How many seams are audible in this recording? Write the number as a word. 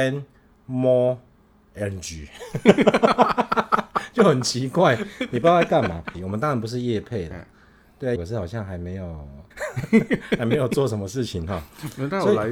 three